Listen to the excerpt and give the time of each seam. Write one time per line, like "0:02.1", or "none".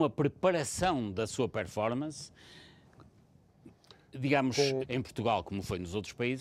0:04.8